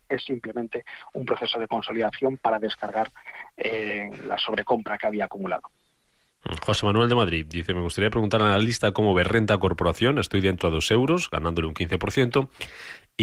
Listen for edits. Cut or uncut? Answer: uncut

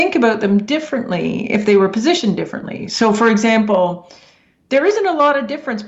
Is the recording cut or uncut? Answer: uncut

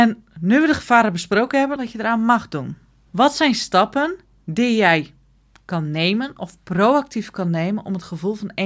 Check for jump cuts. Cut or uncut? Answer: cut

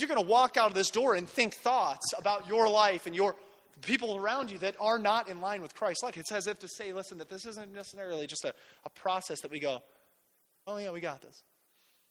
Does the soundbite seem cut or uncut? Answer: cut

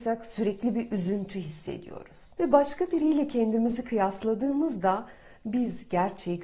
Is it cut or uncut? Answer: cut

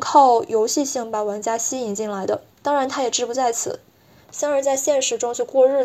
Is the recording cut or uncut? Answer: cut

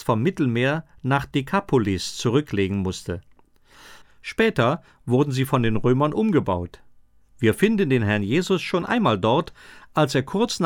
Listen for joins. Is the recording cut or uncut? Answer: cut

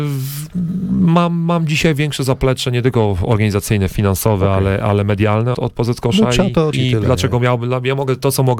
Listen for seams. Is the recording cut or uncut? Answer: cut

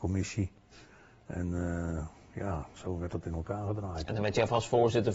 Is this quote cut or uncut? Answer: uncut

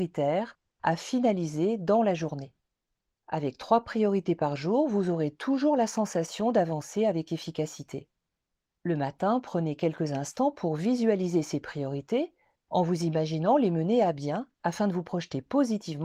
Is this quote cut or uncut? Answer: cut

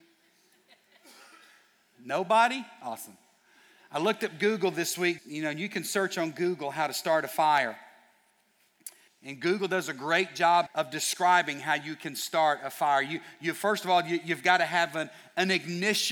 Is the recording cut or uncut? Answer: cut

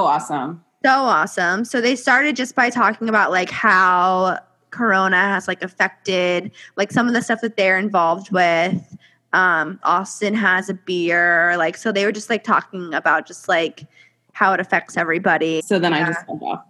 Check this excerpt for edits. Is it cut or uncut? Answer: cut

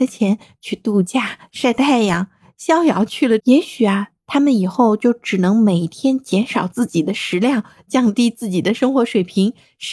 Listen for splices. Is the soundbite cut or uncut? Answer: cut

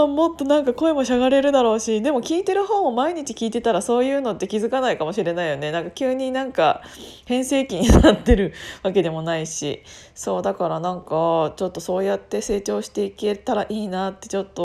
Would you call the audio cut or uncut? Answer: uncut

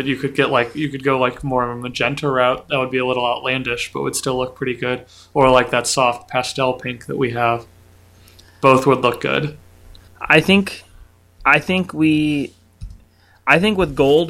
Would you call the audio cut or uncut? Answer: uncut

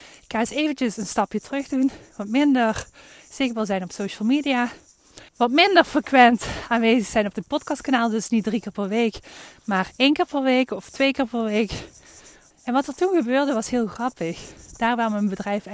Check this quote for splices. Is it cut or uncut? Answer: cut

